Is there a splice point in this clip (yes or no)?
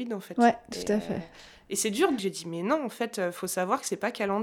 yes